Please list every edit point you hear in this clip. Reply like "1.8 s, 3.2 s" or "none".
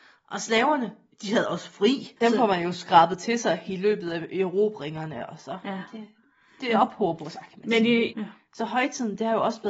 2.2 s, 8.1 s